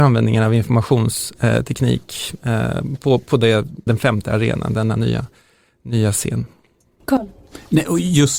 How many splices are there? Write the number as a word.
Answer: one